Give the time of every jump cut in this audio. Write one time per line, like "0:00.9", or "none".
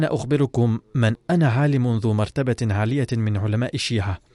0:01.2